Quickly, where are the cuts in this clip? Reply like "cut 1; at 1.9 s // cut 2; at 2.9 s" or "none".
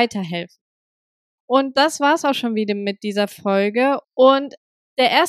cut 1; at 4.0 s

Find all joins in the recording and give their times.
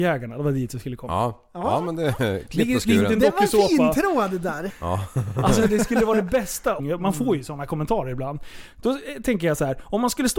cut 1; at 4.7 s // cut 2; at 6.8 s

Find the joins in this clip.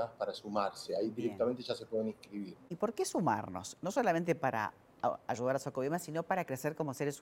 none

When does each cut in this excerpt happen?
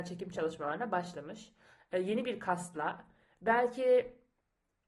none

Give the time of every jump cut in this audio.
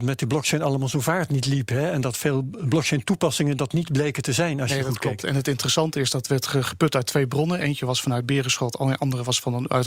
none

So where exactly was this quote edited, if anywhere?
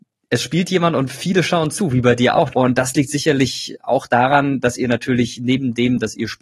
cut 1; at 2.5 s

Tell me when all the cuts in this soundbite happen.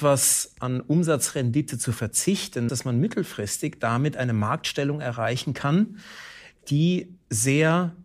cut 1; at 2.7 s

